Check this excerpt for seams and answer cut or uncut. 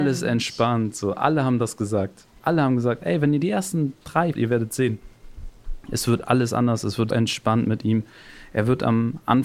cut